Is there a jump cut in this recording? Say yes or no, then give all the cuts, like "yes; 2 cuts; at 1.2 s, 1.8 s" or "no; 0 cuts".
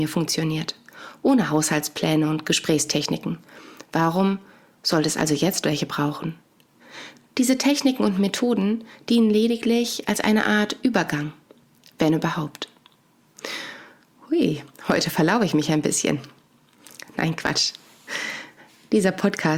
no; 0 cuts